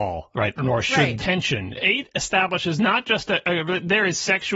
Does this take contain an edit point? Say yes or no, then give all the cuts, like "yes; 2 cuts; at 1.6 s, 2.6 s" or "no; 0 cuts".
yes; 1 cut; at 1.2 s